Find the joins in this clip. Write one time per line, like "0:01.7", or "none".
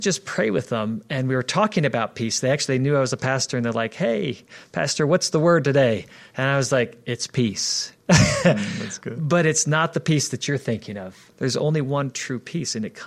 0:11.3

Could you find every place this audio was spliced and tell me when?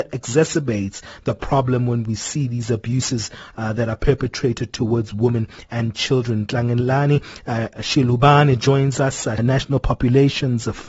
0:09.4

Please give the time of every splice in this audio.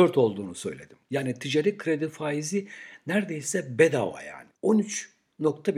0:04.5

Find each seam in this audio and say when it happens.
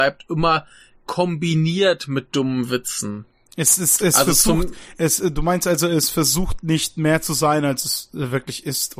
none

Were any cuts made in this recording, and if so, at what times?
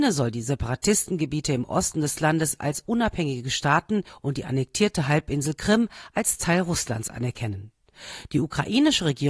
none

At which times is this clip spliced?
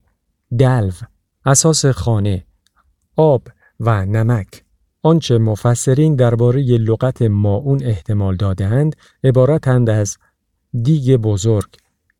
0:04.9

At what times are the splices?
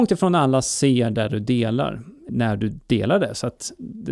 0:02.3

